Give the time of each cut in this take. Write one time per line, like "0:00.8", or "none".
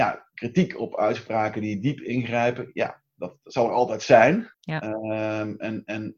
0:04.5